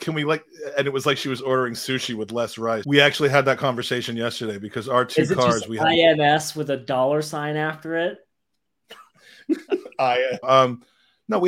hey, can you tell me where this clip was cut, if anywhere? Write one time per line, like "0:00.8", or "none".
0:02.8
0:10.4